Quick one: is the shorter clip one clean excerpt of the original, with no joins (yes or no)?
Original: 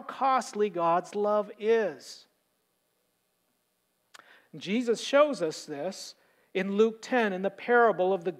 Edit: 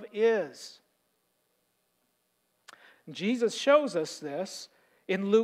yes